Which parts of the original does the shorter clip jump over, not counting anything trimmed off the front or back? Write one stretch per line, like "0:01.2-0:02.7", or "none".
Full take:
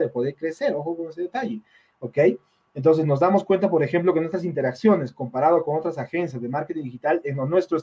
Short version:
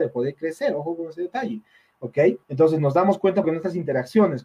0:02.4-0:02.7
0:03.7-0:04.1